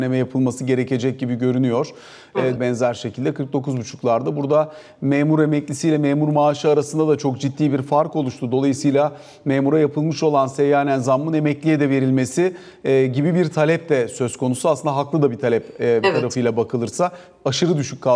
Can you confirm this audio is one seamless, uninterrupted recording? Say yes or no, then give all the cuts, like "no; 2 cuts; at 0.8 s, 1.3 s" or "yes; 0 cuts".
no; 1 cut; at 2.6 s